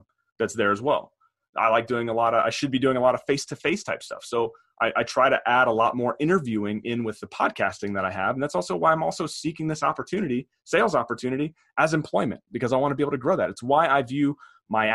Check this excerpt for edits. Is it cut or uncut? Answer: uncut